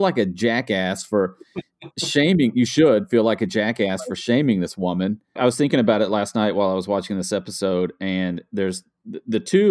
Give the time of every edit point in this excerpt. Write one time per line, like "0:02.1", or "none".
0:05.4